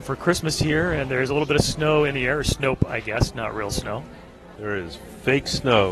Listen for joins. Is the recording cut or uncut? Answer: cut